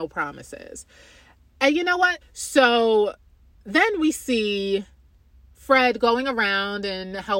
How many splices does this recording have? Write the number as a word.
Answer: one